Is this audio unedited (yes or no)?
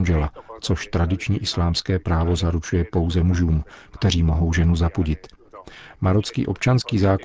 yes